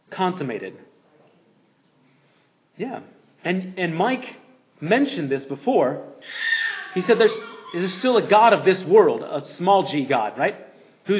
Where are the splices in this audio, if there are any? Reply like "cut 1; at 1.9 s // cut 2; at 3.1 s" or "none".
none